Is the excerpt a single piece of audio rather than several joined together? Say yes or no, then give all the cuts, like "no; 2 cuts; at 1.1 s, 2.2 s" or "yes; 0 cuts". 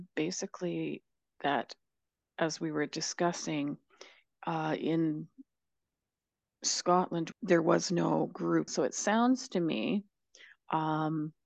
no; 2 cuts; at 7.3 s, 8.7 s